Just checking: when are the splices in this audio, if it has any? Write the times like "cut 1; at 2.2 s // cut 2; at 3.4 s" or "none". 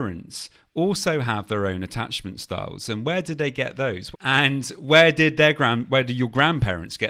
cut 1; at 4.1 s

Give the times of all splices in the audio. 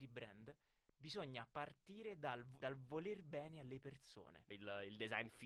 cut 1; at 2.6 s // cut 2; at 4.5 s

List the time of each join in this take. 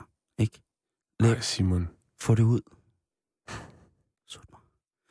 none

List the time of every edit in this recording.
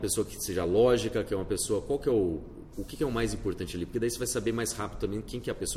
none

